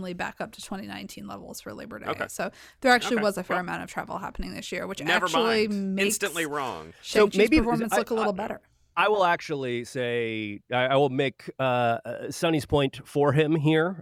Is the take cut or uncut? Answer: uncut